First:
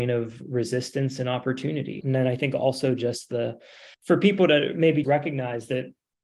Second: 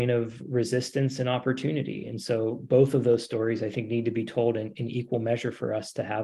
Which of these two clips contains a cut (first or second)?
first